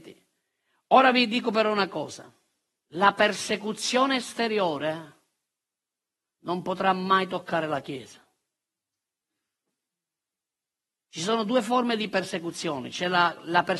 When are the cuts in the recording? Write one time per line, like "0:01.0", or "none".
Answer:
0:02.8